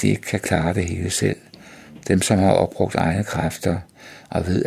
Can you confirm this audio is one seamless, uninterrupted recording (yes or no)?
yes